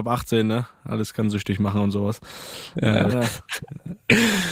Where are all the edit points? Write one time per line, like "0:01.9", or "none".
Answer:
0:03.1